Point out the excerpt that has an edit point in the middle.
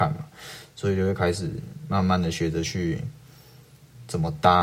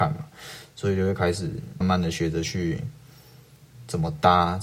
second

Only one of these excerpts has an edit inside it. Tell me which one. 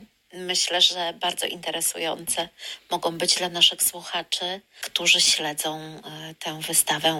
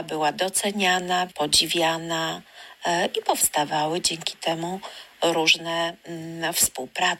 second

